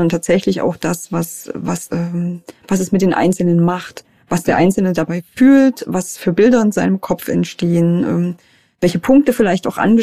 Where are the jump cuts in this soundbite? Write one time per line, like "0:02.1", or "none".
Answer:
0:01.9